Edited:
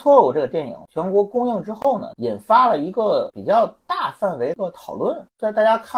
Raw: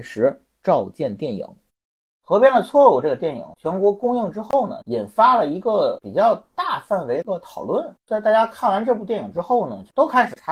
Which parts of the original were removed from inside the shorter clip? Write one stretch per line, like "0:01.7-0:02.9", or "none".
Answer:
none